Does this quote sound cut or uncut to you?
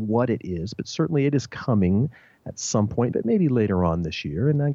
cut